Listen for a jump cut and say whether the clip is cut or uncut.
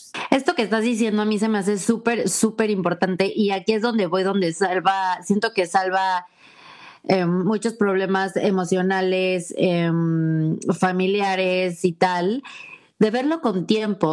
uncut